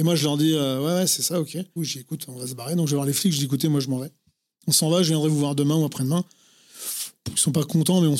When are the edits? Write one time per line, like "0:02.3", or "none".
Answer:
0:01.8